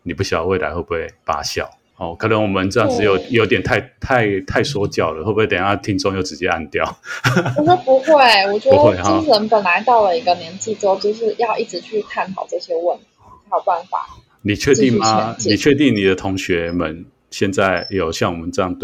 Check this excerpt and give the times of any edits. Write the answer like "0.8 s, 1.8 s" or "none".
none